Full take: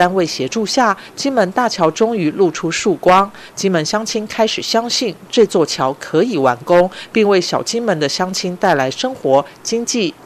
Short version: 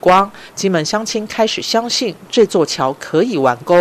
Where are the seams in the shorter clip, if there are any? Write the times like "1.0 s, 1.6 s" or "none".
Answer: none